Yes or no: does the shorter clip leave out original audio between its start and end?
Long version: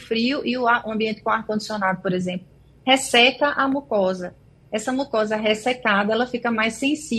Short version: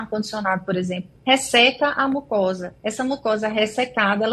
yes